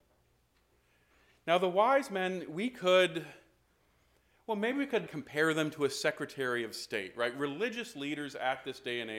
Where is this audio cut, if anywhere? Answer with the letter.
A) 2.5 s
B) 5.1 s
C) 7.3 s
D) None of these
B